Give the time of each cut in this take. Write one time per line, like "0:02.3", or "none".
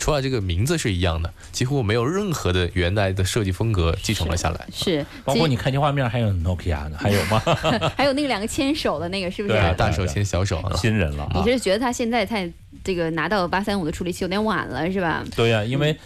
0:10.7